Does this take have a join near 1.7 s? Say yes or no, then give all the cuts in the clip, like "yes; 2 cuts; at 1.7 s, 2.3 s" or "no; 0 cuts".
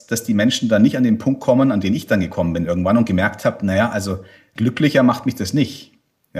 no; 1 cut; at 4.6 s